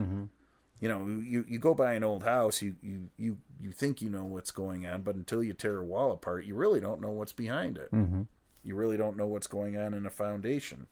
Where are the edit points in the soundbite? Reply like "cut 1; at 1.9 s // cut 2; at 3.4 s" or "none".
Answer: none